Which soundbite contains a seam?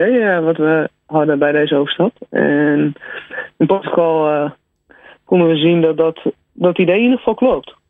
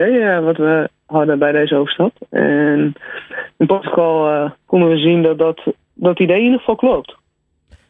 second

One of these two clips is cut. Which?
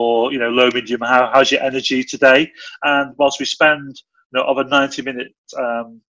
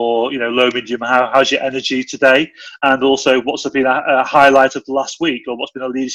first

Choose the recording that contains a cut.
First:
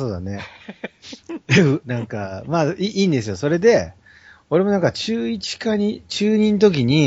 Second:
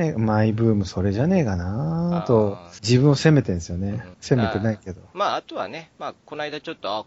second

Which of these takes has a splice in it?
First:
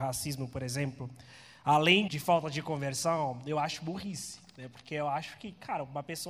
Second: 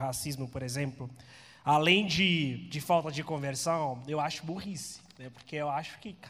first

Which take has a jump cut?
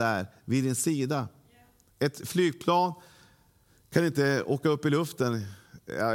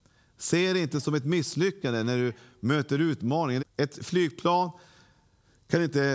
second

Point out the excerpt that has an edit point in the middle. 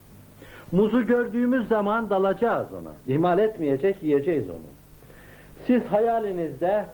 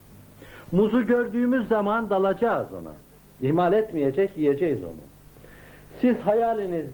first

